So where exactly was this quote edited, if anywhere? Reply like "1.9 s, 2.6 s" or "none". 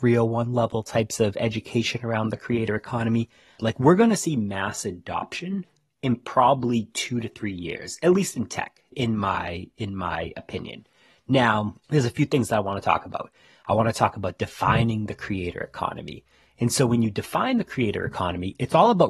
3.6 s, 8.9 s